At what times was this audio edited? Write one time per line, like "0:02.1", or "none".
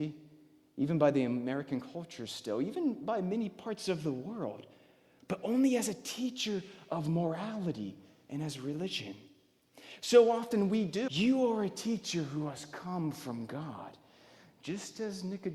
0:11.1